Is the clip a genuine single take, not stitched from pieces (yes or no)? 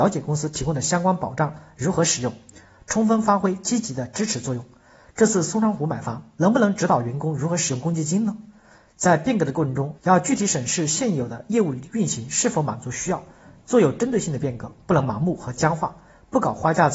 no